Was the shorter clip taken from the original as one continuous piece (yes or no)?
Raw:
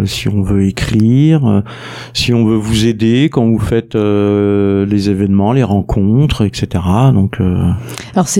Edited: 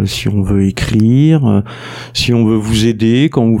yes